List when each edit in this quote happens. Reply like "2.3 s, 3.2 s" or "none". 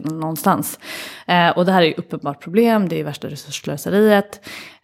none